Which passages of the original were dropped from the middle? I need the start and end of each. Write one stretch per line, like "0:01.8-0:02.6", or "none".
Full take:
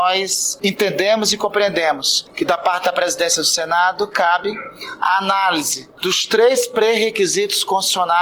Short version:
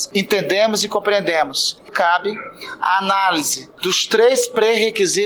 0:02.4-0:04.1